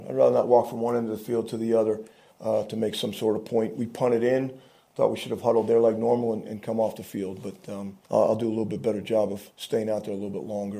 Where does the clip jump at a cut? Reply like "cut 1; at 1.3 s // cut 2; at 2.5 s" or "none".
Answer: cut 1; at 8.0 s